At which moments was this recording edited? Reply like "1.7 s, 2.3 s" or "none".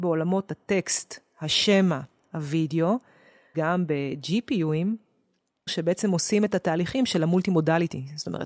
3.5 s, 5.7 s